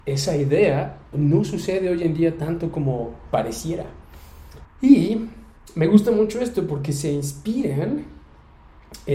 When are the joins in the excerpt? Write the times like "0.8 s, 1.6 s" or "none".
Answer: 1.1 s, 4.6 s